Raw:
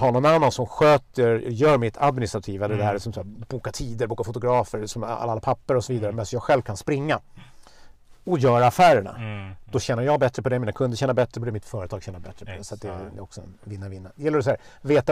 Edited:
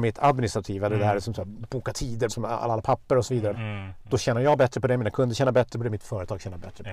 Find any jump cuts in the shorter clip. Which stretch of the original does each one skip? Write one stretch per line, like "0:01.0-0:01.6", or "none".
0:04.1-0:04.9
0:06.1-0:09.1